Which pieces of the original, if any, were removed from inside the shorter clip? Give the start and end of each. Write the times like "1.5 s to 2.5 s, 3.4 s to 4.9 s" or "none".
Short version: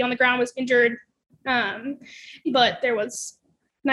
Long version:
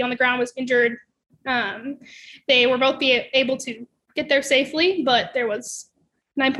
2.4 s to 5.0 s